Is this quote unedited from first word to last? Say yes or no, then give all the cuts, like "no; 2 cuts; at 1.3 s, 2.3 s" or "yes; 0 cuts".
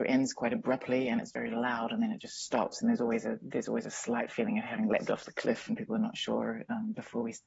yes; 0 cuts